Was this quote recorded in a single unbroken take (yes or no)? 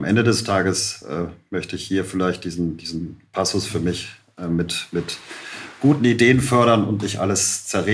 yes